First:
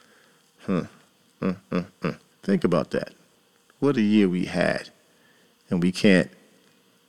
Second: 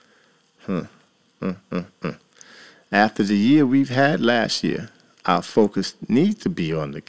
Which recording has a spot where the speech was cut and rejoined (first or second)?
first